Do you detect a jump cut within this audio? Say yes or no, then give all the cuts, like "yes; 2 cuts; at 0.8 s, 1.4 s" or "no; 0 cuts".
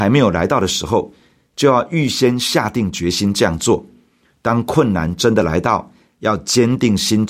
no; 0 cuts